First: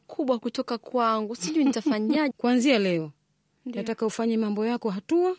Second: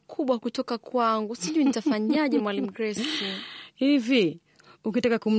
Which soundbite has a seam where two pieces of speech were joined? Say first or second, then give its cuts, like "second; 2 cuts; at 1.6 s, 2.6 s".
first; 1 cut; at 2.3 s